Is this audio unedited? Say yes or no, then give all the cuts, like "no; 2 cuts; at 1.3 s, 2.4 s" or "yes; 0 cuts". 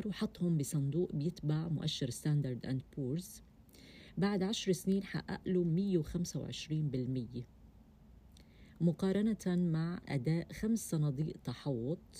yes; 0 cuts